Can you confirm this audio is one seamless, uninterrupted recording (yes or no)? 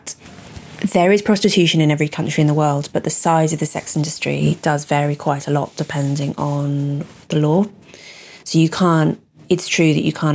yes